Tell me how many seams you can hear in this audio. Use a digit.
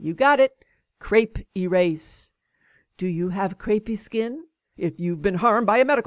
1